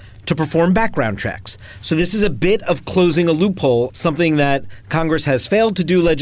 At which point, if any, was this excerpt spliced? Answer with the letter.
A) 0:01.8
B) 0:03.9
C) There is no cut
B